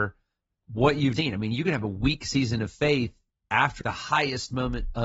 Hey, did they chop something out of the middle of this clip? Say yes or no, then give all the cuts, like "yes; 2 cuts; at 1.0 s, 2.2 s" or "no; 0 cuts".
yes; 2 cuts; at 1.2 s, 3.8 s